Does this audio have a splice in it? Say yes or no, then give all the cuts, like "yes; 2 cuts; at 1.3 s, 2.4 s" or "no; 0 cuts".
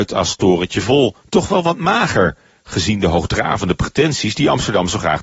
yes; 1 cut; at 1.2 s